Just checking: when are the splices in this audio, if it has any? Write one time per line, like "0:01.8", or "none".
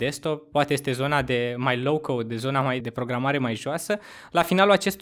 0:02.8

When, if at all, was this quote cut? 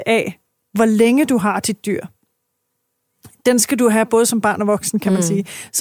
none

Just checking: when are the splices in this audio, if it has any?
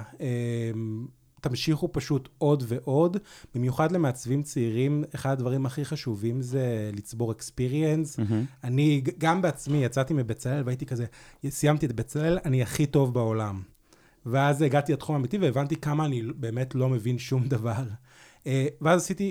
none

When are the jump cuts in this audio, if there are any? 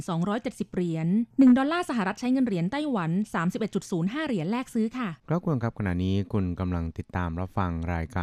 0:01.3

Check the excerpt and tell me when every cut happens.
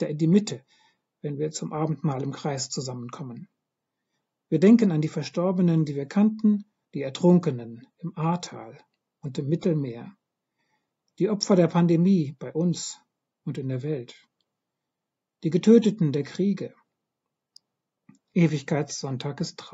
0:06.8

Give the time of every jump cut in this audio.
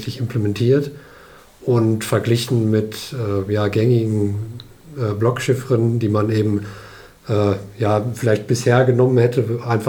none

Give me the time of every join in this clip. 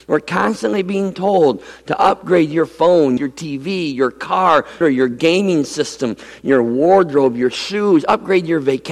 0:03.2
0:04.8

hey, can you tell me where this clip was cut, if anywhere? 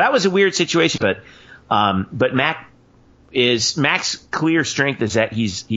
0:01.0

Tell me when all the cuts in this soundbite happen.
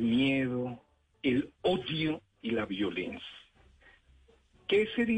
0:01.1

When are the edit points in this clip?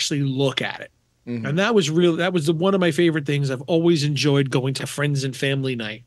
0:04.8

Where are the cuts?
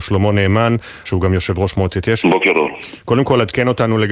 0:01.1
0:02.2

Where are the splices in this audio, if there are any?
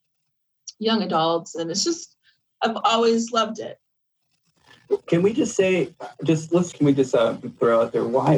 0:06.7

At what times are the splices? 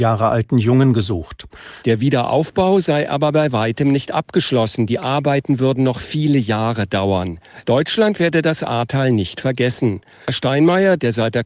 0:01.8
0:07.6
0:10.2

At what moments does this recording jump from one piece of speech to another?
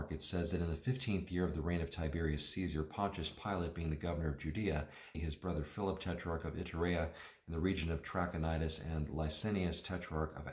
0:05.1

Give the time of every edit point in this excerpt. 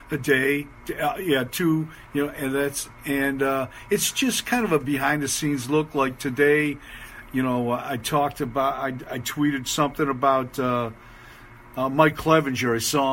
none

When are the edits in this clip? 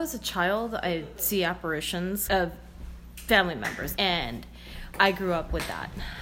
0:02.3
0:04.0

